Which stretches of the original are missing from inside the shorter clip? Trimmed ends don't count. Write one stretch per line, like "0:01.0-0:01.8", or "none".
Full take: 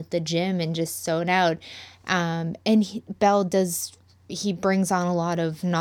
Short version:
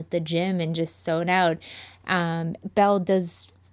0:02.6-0:03.0